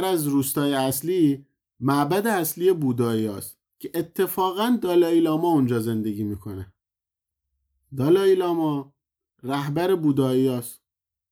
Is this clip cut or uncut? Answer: cut